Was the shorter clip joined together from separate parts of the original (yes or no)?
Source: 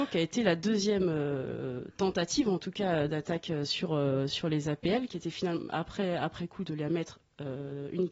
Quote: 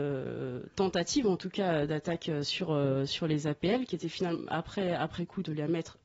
no